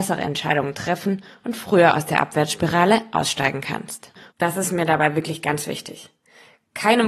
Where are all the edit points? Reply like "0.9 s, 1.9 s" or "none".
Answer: 4.3 s